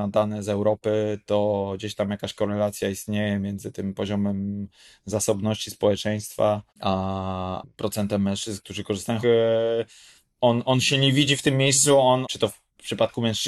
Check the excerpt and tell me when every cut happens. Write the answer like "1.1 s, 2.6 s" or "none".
6.7 s, 9.2 s, 12.2 s